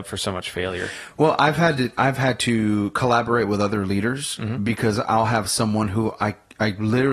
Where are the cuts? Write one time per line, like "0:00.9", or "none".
none